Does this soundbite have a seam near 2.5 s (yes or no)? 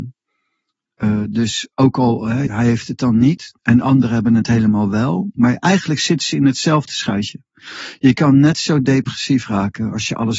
yes